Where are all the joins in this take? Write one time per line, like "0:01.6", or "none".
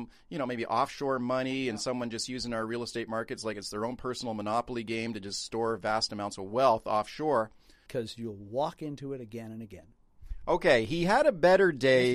0:07.9